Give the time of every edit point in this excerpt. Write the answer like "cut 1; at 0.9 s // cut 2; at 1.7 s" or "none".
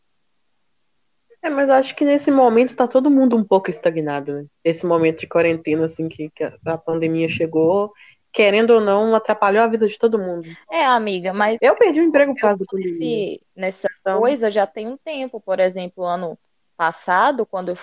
none